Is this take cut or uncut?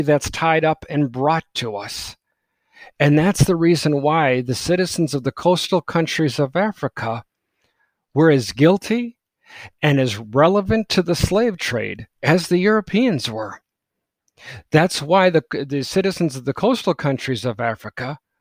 uncut